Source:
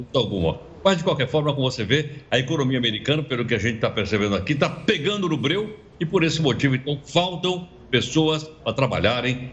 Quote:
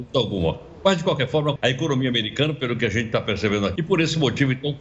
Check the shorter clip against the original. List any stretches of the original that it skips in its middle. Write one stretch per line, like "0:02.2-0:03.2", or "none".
0:01.6-0:02.2
0:04.4-0:06.0